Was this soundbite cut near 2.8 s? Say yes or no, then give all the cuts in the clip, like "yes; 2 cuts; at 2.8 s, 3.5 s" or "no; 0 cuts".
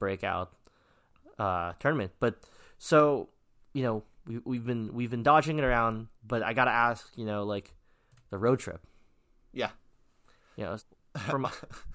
no; 2 cuts; at 6.1 s, 10.8 s